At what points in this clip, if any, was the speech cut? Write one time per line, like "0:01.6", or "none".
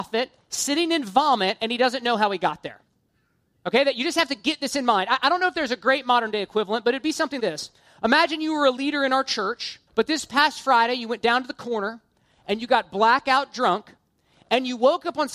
0:07.4
0:09.9